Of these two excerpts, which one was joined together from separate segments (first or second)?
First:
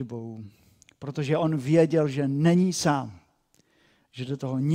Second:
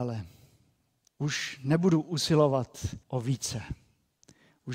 second